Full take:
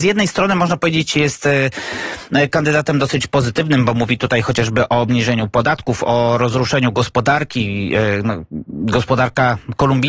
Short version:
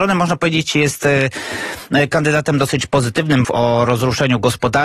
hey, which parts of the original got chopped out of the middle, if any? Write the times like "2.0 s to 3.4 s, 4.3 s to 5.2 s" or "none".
3.9 s to 6.0 s